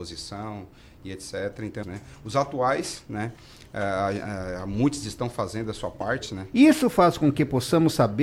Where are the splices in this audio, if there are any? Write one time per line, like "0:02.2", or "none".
0:01.8
0:06.5